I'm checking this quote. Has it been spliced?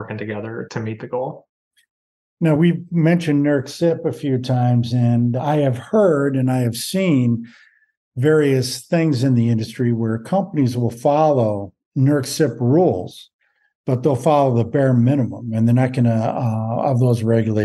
no; 0 cuts

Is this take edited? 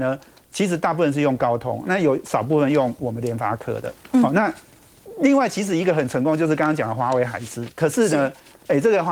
no; 0 cuts

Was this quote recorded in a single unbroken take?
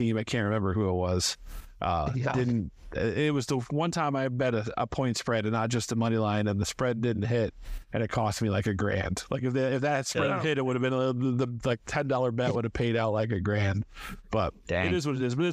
yes; 0 cuts

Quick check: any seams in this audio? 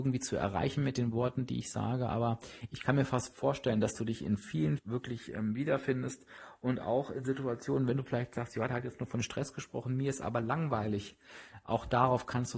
yes; 1 cut; at 4.8 s

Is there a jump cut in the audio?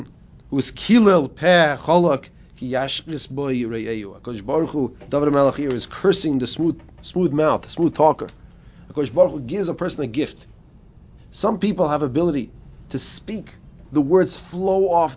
no; 0 cuts

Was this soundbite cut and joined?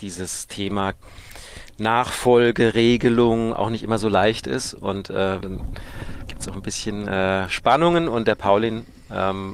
yes; 1 cut; at 5.4 s

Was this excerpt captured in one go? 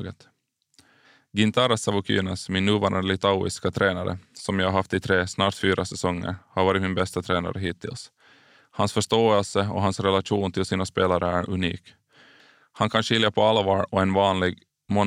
yes; 0 cuts

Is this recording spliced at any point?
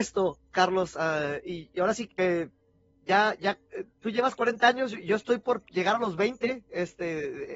yes; 1 cut; at 2.1 s

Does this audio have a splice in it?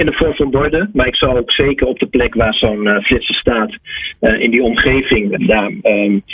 yes; 1 cut; at 5.4 s

